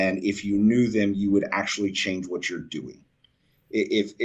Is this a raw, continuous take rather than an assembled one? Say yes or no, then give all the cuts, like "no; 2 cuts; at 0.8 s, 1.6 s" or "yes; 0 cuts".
yes; 0 cuts